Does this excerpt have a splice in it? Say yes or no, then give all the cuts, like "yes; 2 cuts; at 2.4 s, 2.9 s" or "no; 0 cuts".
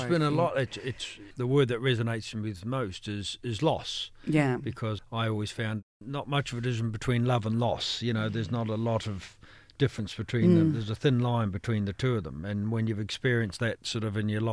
no; 0 cuts